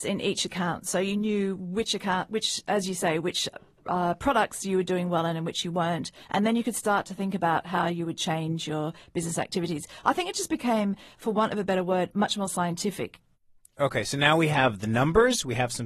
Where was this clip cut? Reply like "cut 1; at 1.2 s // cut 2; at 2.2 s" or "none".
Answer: none